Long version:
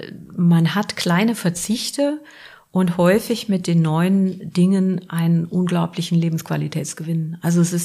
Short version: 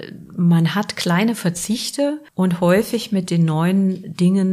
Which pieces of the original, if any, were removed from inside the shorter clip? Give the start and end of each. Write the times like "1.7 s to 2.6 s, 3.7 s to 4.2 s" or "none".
2.3 s to 2.7 s